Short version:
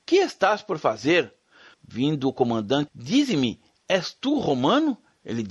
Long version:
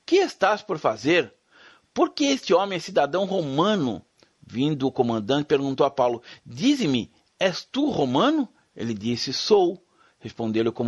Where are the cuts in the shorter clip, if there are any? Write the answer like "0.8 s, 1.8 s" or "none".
1.7 s, 2.9 s